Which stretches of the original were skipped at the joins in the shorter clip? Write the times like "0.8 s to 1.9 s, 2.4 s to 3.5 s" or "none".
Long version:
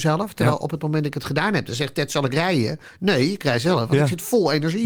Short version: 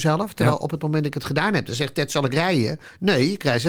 none